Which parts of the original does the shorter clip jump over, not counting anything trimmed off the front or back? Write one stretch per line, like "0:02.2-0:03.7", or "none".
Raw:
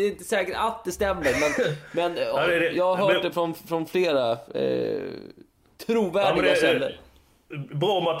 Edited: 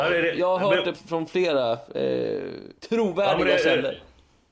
0:03.3-0:03.6
0:05.4-0:05.7